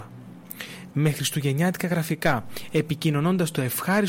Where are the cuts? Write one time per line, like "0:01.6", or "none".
0:00.9